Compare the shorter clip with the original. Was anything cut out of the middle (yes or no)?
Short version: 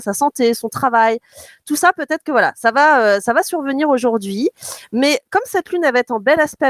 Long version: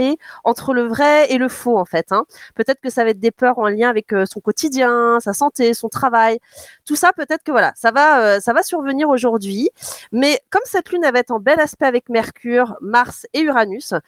no